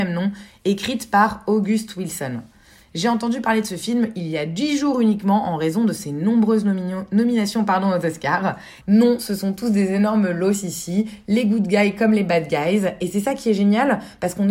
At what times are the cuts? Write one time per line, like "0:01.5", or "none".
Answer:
0:08.8